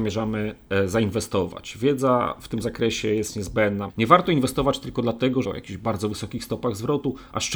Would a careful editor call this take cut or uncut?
cut